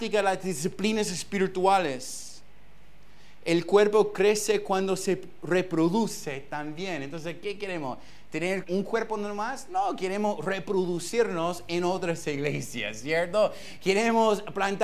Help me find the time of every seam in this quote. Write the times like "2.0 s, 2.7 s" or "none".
8.6 s